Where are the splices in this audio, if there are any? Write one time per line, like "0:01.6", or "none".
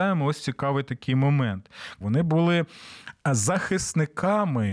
0:02.0